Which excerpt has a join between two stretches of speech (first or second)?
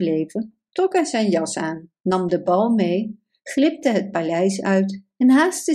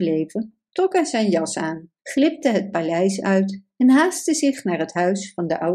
second